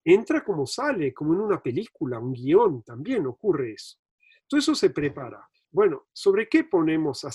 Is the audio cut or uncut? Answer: cut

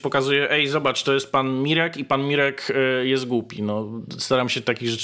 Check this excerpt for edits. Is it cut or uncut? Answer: uncut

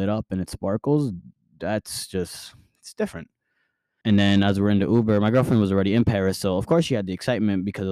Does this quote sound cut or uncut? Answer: cut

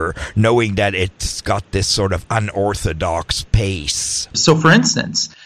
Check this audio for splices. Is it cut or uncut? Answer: cut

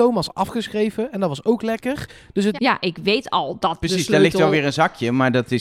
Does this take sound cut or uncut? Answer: cut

